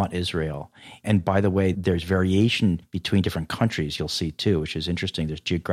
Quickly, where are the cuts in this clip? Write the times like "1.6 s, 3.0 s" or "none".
none